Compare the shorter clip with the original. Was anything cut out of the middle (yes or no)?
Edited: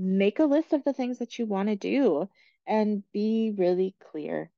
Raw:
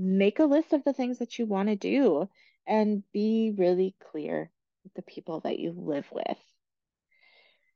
no